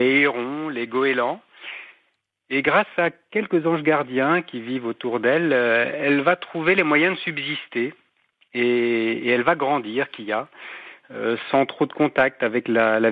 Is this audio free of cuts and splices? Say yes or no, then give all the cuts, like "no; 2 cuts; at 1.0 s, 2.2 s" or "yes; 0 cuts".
yes; 0 cuts